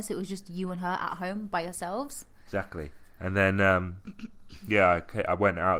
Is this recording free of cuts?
yes; 0 cuts

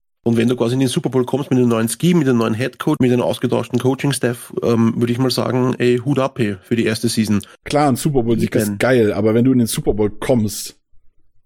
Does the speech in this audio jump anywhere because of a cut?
yes; 2 cuts; at 3.0 s, 7.6 s

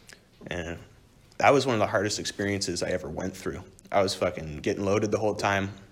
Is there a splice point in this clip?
yes; 1 cut; at 3.8 s

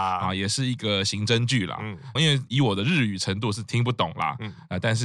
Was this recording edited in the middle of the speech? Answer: yes; 1 cut; at 2.2 s

